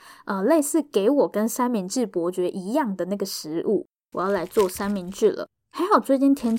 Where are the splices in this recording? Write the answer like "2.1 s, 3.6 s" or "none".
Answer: 4.1 s

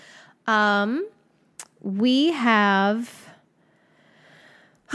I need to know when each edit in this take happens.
none

